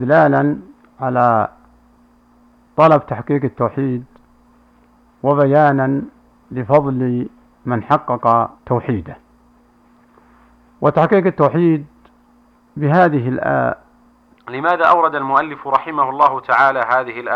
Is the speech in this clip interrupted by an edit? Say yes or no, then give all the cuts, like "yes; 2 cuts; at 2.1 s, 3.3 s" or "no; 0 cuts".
yes; 2 cuts; at 8.6 s, 14.3 s